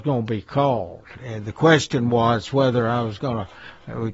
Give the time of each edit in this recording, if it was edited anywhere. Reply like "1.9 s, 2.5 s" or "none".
none

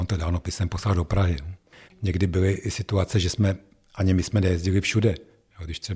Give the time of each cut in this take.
1.9 s

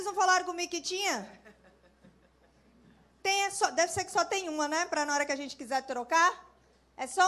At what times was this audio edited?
none

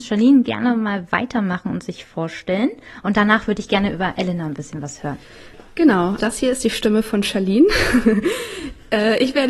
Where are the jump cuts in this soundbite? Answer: 6.2 s

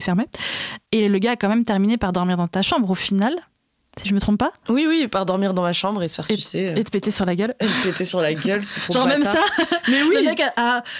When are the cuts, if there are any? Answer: none

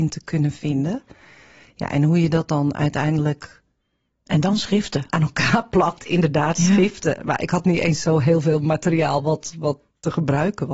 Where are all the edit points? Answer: none

